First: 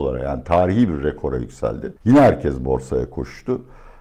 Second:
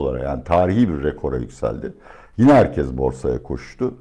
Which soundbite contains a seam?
first; 1 cut; at 2.0 s

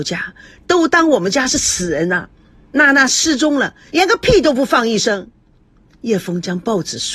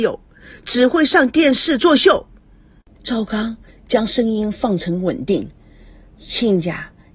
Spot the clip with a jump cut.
first; 1 cut; at 3.9 s

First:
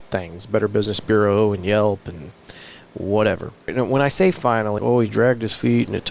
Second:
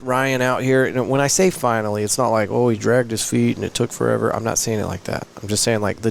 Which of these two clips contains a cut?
first; 2 cuts; at 3.7 s, 4.8 s

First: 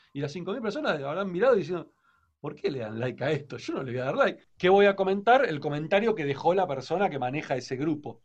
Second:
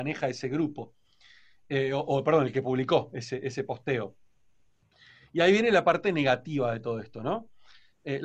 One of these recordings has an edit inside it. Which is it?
first; 1 cut; at 4.5 s

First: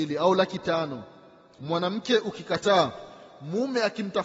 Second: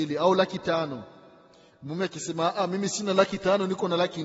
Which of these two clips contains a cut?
first; 1 cut; at 1.6 s

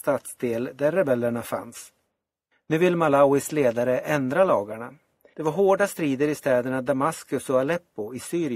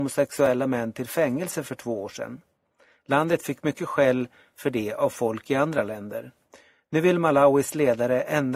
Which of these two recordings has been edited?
first; 2 cuts; at 2.5 s, 5.3 s

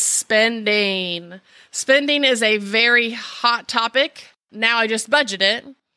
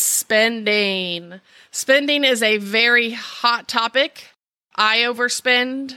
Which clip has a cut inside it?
first; 1 cut; at 4.4 s

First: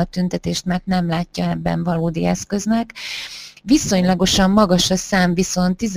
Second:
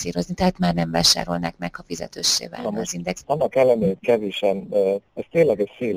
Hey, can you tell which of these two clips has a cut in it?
second; 2 cuts; at 3.2 s, 5.0 s

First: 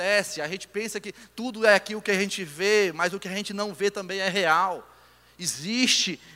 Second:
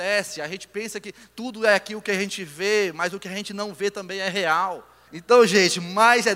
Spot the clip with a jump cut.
second; 1 cut; at 5.1 s

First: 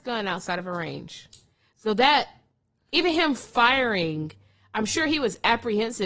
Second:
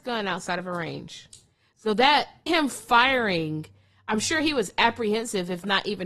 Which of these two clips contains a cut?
second; 1 cut; at 2.5 s

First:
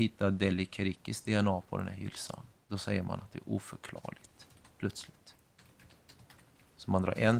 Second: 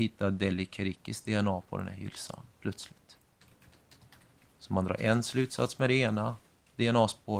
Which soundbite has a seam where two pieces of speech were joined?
second; 1 cut; at 2.5 s

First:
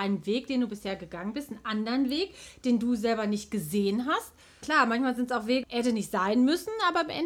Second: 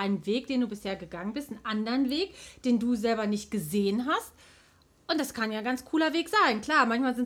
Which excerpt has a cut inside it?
first; 2 cuts; at 4.6 s, 5.6 s

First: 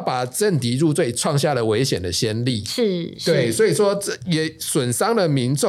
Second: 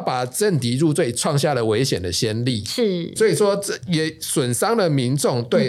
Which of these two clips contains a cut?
second; 1 cut; at 3.2 s

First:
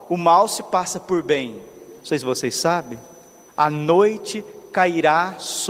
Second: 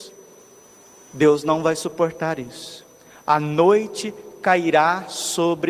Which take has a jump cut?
first; 2 cuts; at 2.0 s, 3.5 s

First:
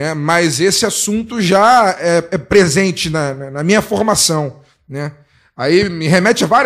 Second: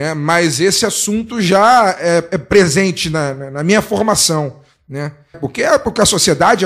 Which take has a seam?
second; 1 cut; at 5.3 s

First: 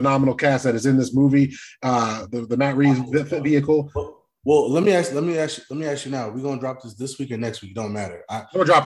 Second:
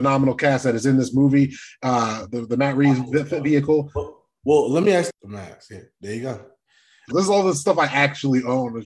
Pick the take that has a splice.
second; 2 cuts; at 5.1 s, 7.1 s

